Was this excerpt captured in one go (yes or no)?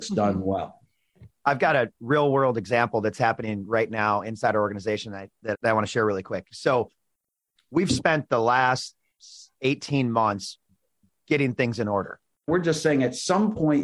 no